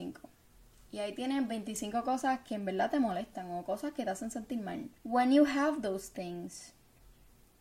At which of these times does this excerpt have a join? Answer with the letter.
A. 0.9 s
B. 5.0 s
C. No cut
B